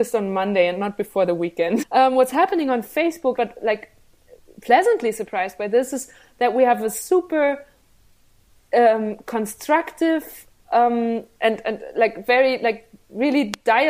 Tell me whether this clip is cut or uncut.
cut